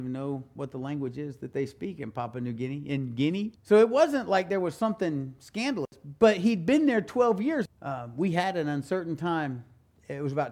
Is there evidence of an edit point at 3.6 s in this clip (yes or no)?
yes